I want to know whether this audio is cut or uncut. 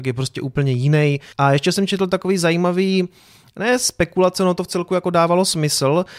cut